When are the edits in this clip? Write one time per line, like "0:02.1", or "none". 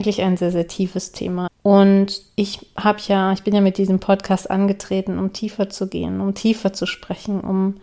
0:01.5